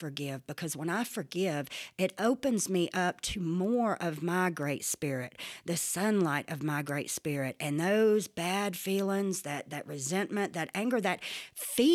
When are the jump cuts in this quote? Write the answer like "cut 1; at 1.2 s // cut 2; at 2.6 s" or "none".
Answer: none